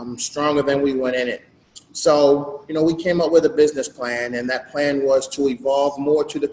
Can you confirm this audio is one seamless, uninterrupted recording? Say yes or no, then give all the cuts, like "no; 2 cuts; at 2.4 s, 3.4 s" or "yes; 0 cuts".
yes; 0 cuts